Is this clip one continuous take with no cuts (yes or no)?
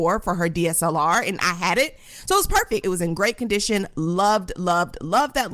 no